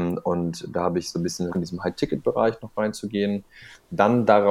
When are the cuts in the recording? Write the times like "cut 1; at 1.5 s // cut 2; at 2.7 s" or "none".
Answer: cut 1; at 1.5 s